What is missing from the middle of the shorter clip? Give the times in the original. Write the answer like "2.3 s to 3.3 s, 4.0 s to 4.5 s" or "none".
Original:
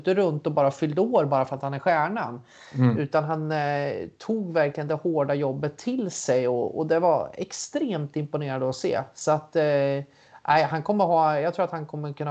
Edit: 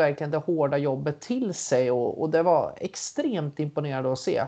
none